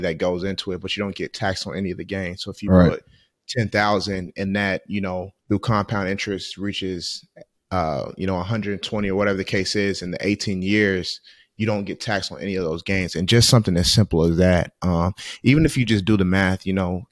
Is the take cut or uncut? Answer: cut